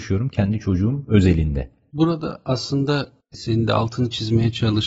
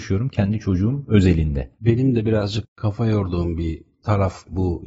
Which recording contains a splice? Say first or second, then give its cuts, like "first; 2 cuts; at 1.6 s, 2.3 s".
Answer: second; 1 cut; at 1.7 s